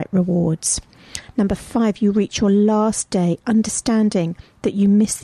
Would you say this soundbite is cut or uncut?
uncut